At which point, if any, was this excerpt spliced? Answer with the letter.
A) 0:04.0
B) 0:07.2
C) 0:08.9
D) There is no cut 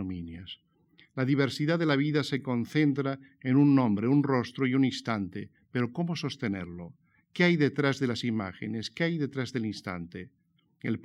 D